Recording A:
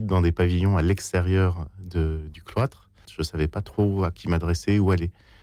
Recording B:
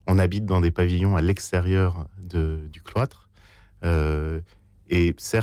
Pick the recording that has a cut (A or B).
A